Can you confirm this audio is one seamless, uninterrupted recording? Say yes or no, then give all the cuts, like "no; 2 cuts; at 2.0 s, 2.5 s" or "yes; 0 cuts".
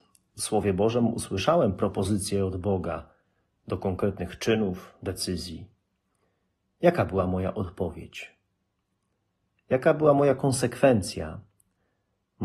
yes; 0 cuts